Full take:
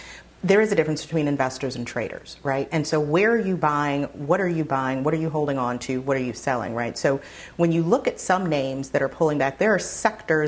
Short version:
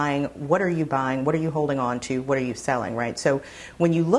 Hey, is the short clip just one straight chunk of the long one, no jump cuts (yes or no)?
yes